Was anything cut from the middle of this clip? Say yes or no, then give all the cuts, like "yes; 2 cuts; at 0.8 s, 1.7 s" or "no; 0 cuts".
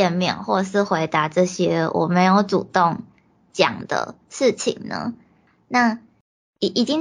no; 0 cuts